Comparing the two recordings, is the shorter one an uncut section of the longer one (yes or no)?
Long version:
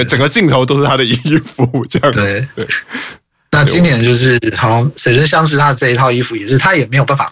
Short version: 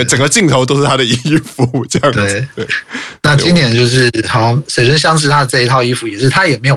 no